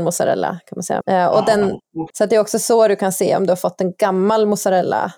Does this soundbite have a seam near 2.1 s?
yes; 2 cuts; at 1.0 s, 2.1 s

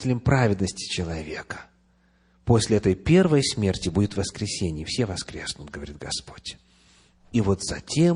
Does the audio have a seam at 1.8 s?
no; 0 cuts

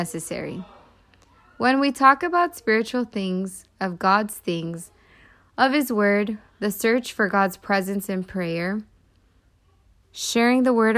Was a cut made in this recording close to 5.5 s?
no; 1 cut; at 10.0 s

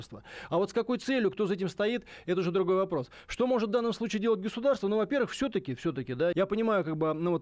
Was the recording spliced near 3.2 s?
no; 1 cut; at 6.3 s

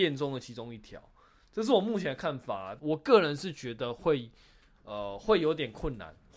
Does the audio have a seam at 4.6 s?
no; 1 cut; at 2.8 s

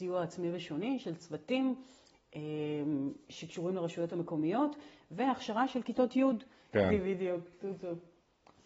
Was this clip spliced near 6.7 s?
yes; 1 cut; at 6.7 s

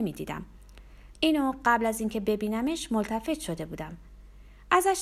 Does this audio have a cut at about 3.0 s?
no; 1 cut; at 1.1 s

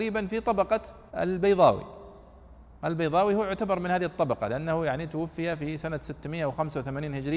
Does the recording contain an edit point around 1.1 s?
yes; 1 cut; at 1.1 s

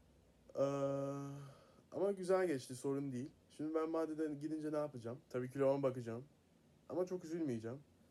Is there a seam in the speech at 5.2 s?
yes; 2 cuts; at 3.4 s, 5.2 s

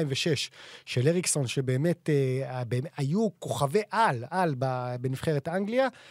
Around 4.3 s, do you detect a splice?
yes; 1 cut; at 4.3 s

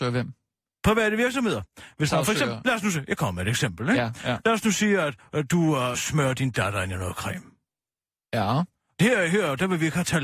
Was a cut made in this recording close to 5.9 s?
yes; 1 cut; at 5.9 s

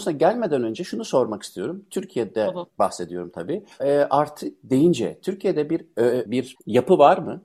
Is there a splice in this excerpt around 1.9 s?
no; 2 cuts; at 3.8 s, 6.3 s

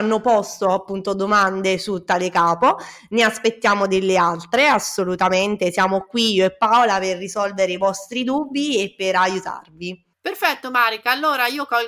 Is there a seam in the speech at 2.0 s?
no; 1 cut; at 10.1 s

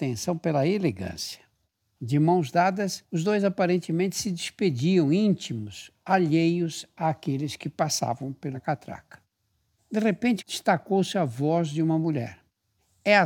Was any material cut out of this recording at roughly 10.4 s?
yes; 2 cuts; at 2.0 s, 10.4 s

